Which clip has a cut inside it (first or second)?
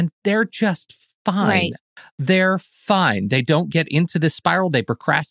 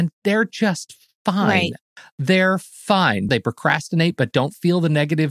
second